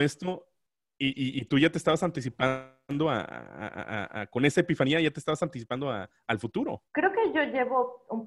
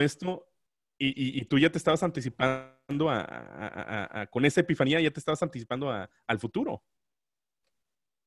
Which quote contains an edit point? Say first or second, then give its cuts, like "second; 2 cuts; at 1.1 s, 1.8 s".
first; 1 cut; at 6.9 s